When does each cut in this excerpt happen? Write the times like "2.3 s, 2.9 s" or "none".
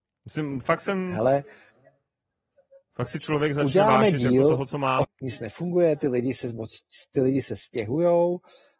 5.0 s